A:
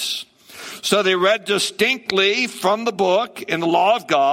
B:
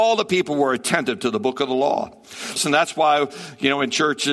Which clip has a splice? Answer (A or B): B